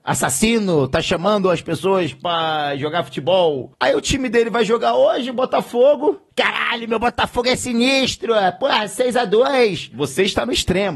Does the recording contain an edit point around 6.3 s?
yes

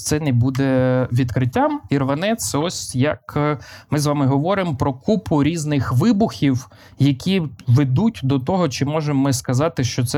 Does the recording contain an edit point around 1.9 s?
yes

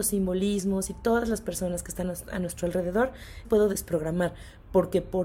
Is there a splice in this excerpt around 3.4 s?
yes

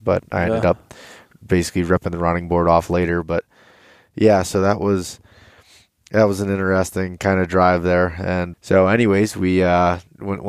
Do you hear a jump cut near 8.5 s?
yes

